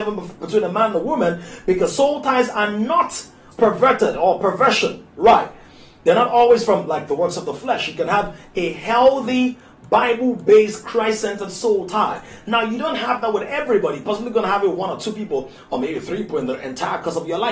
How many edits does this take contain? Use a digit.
1